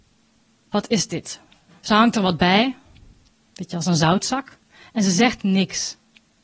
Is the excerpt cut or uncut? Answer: cut